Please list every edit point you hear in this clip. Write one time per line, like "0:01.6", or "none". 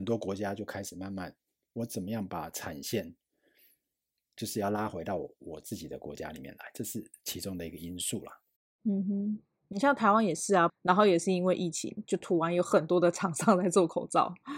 0:10.7